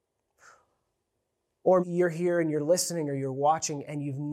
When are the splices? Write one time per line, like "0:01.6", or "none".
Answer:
0:01.8